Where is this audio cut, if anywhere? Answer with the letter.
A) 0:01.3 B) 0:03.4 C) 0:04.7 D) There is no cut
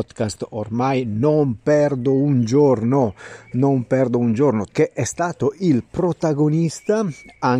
C